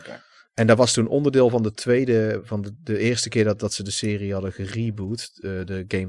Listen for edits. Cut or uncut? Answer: uncut